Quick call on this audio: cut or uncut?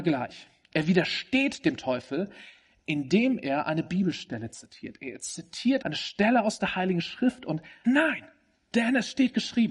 cut